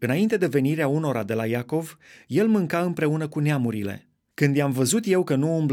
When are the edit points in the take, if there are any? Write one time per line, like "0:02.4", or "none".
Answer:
0:04.3